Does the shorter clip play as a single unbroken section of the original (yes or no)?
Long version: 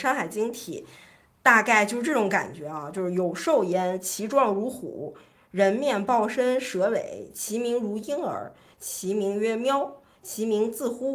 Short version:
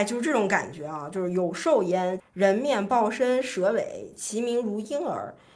no